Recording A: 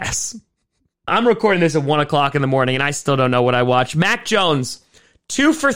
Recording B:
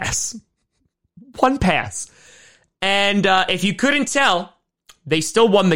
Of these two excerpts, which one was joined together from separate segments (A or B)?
A